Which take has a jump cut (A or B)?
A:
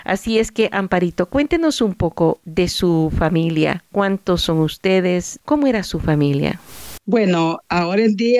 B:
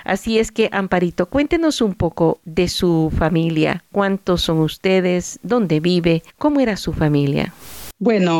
A